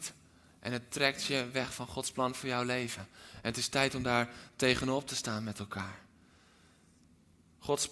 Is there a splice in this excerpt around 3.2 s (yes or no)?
no